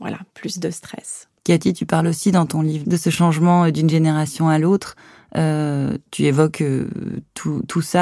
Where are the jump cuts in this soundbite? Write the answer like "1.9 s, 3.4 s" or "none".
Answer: 1.4 s